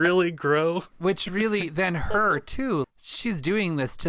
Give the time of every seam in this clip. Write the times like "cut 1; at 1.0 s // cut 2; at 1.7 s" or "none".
cut 1; at 2.8 s